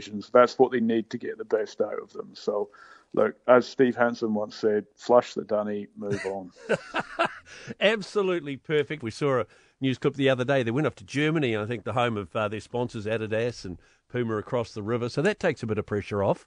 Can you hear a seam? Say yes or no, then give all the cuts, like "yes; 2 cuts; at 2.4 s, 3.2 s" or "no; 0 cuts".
yes; 2 cuts; at 9.0 s, 15.1 s